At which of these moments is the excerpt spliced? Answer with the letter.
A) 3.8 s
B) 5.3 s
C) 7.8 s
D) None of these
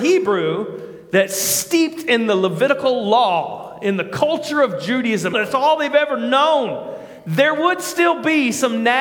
B